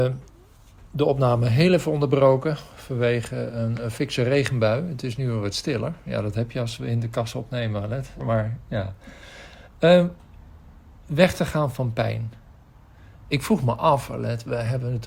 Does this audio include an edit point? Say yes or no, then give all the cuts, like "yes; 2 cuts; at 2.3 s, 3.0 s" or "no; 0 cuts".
yes; 1 cut; at 8.2 s